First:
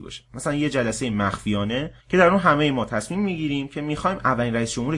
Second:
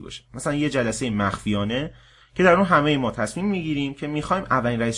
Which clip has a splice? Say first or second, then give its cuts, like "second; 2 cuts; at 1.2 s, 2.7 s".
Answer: first; 1 cut; at 2.0 s